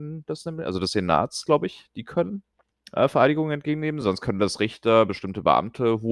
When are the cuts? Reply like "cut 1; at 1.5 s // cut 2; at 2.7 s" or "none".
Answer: none